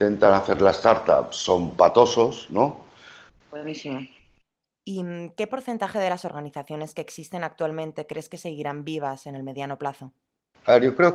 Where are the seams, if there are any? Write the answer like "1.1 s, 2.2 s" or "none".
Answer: 3.3 s